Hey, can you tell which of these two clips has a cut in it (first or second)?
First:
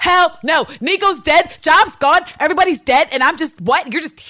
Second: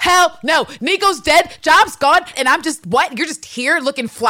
second